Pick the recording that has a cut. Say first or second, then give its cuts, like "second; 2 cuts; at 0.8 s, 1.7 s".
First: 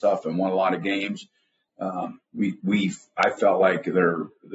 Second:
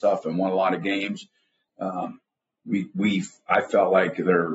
first; 1 cut; at 2.2 s